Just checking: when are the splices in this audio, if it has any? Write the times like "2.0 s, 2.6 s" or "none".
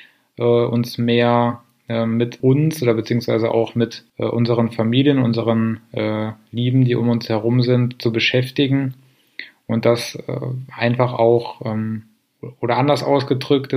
2.4 s, 4.1 s